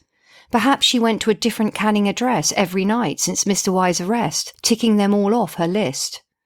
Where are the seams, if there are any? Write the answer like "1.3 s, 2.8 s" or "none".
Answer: none